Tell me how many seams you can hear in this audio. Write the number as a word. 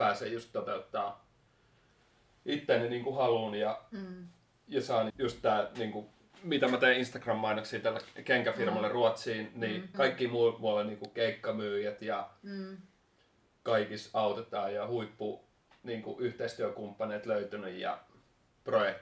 two